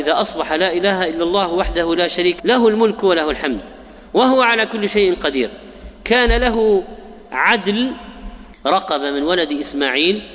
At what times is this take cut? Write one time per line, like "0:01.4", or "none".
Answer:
0:02.4
0:08.6